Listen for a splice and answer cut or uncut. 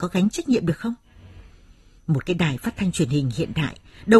uncut